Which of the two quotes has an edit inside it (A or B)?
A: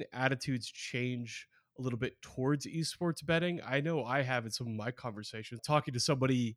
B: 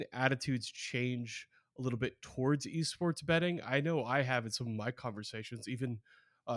A